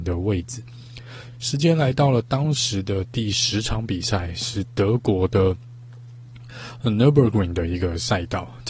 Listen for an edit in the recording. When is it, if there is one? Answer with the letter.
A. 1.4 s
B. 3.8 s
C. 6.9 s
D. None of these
D